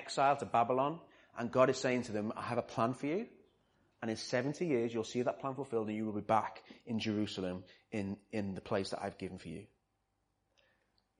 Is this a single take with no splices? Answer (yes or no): yes